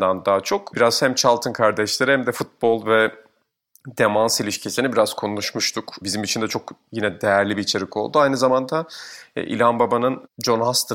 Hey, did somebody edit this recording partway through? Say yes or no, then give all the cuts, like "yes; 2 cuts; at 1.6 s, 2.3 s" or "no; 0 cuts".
no; 0 cuts